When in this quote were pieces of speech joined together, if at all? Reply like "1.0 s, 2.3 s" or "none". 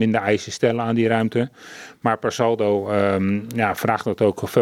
none